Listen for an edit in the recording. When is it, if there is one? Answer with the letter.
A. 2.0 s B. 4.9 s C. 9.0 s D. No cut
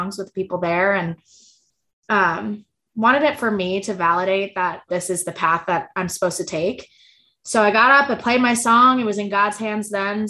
B